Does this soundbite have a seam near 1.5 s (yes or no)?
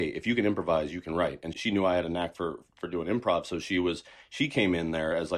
yes